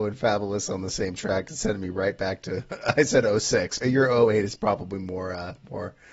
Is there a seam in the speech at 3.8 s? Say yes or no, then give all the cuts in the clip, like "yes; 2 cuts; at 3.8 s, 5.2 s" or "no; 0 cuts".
yes; 1 cut; at 3.8 s